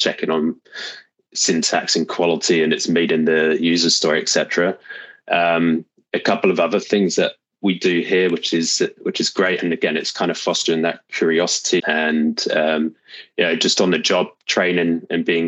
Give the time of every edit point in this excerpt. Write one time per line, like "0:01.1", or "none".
0:11.8